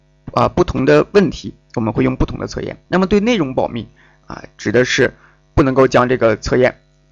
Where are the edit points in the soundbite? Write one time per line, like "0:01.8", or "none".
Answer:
0:02.9